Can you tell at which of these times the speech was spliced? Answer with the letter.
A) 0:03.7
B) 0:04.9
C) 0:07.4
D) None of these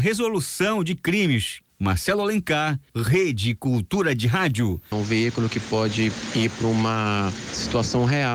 B